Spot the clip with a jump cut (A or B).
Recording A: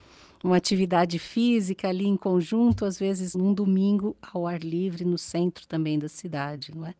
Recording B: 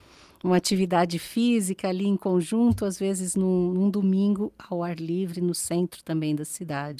A